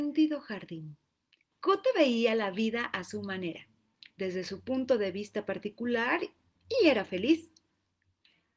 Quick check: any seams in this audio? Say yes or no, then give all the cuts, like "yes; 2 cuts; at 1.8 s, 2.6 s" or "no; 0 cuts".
yes; 1 cut; at 1.5 s